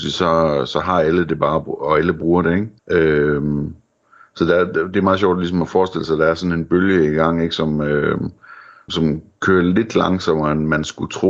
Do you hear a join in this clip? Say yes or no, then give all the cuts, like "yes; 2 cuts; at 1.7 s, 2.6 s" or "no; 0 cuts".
yes; 2 cuts; at 2.8 s, 8.9 s